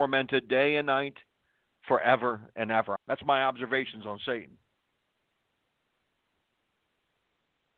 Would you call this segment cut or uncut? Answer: cut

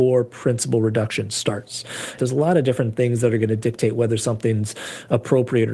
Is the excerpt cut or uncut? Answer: cut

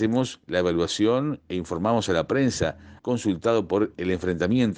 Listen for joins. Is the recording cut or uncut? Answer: cut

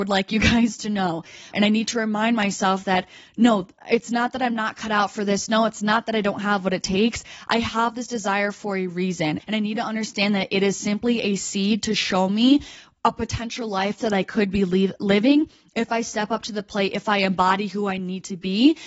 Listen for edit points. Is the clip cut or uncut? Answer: cut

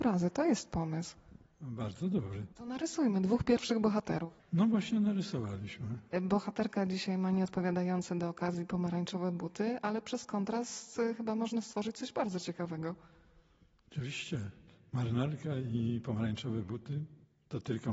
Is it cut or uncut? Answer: cut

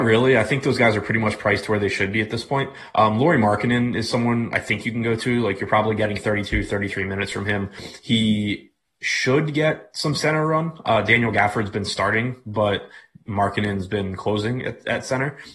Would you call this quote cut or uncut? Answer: uncut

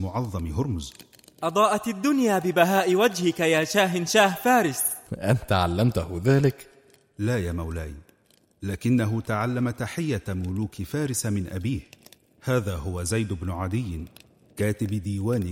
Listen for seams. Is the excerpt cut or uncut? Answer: cut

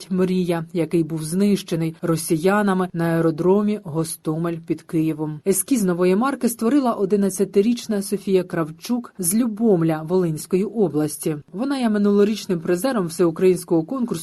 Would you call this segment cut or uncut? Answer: cut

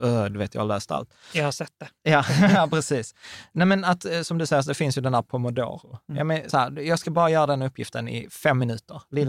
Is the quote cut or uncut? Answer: cut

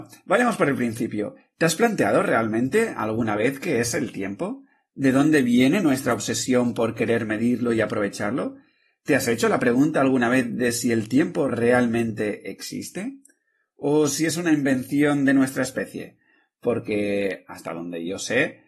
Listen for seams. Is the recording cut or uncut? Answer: uncut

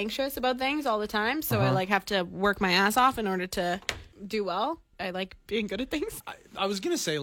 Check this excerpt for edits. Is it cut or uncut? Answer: cut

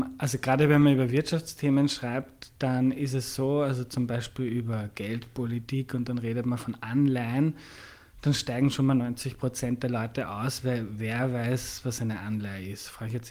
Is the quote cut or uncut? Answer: uncut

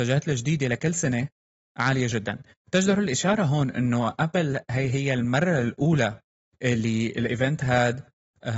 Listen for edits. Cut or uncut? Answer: uncut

